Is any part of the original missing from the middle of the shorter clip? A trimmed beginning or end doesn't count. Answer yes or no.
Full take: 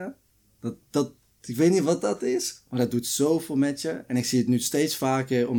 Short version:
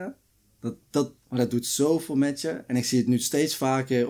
yes